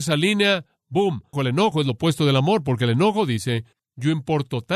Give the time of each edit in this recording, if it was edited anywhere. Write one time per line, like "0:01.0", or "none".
0:01.3